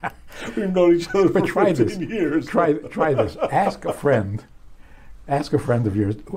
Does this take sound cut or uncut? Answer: uncut